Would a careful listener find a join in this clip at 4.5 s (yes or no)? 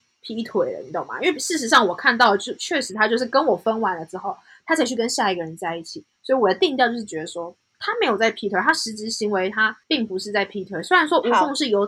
no